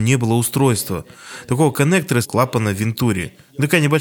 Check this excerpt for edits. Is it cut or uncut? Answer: cut